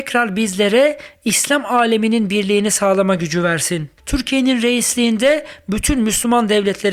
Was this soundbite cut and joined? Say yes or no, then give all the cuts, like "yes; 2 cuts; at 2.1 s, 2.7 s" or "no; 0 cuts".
yes; 1 cut; at 4.0 s